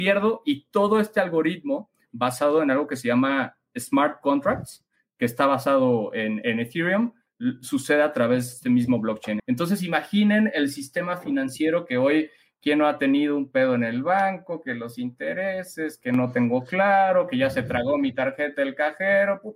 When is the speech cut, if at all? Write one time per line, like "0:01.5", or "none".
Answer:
0:09.4